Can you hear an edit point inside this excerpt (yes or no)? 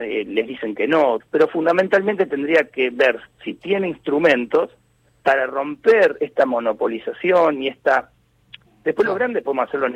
yes